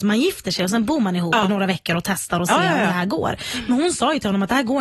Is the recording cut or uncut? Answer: uncut